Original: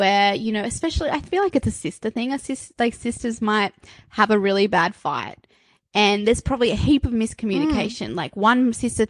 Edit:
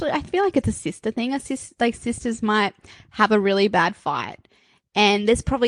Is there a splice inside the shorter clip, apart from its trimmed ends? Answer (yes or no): no